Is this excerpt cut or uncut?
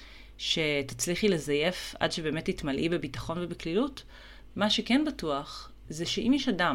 cut